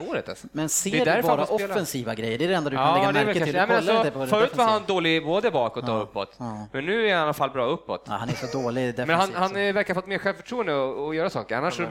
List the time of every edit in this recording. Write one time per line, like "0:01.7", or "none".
none